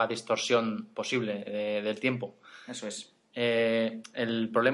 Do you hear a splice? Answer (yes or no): no